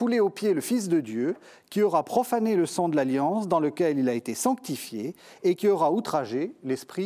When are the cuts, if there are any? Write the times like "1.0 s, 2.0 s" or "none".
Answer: none